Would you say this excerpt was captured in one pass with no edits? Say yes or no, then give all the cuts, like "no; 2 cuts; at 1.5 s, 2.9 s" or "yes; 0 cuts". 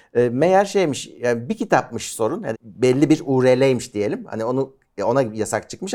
no; 1 cut; at 2.5 s